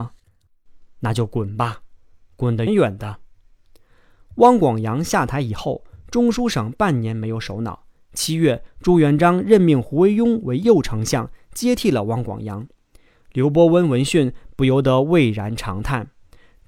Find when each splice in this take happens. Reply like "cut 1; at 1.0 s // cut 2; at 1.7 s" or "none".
cut 1; at 2.7 s